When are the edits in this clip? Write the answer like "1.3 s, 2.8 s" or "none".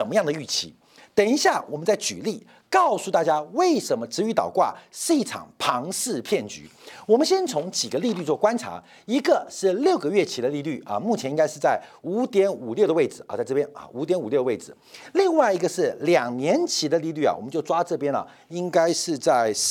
none